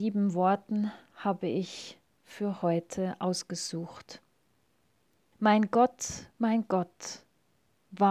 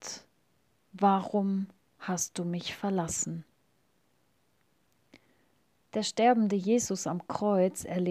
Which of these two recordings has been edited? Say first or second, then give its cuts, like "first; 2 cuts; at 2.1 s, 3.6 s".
first; 1 cut; at 5.3 s